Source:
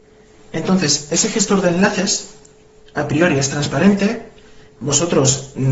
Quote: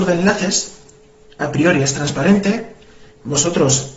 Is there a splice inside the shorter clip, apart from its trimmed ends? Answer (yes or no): no